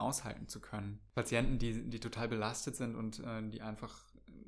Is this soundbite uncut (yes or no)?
yes